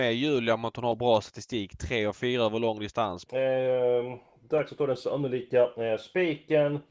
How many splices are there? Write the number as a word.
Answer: one